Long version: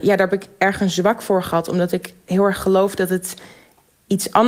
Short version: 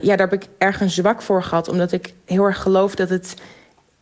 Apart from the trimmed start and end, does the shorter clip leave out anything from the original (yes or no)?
no